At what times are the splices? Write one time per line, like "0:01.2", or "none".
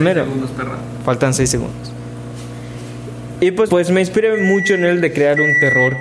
0:03.7